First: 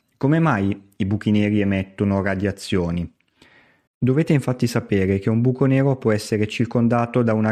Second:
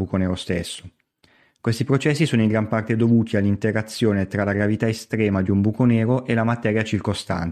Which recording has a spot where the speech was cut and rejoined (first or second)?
first